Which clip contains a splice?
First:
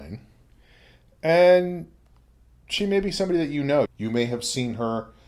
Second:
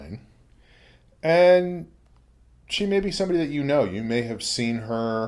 first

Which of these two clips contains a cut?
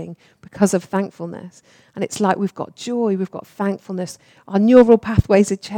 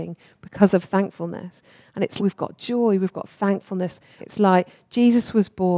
second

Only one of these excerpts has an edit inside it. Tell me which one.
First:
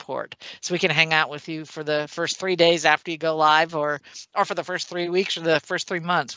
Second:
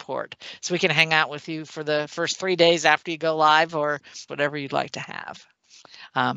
second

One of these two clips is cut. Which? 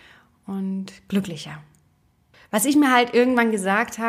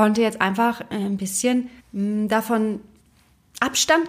second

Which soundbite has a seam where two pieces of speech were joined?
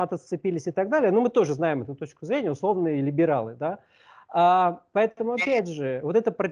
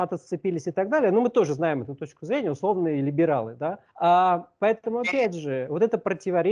second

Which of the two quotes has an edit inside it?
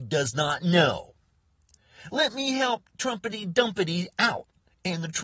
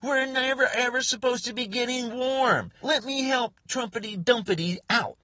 second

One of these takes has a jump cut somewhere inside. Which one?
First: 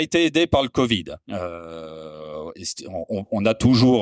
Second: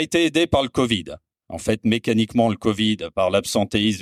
first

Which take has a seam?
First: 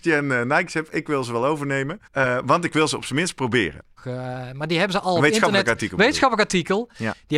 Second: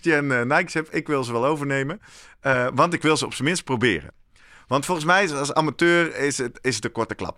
first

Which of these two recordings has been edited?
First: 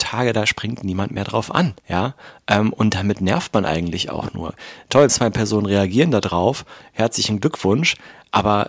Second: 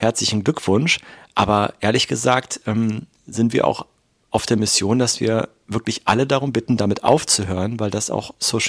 first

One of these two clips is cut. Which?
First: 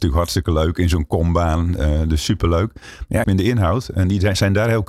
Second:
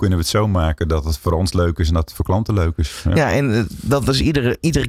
first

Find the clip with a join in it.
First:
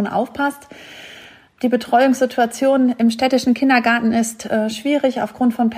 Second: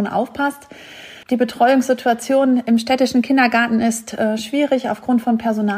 second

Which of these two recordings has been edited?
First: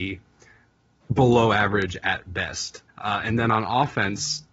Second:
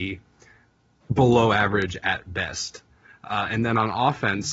first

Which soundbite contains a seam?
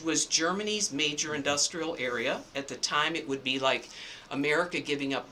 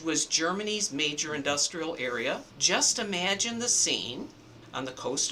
second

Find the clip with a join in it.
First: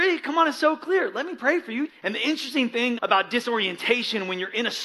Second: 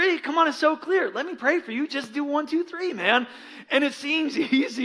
first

